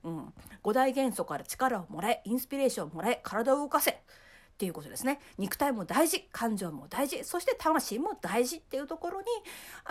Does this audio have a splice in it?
no; 0 cuts

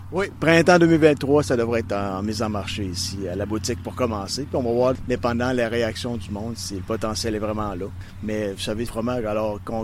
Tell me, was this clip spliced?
yes; 1 cut; at 8.9 s

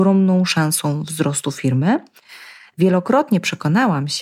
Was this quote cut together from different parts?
no; 0 cuts

